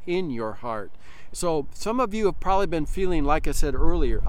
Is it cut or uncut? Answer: cut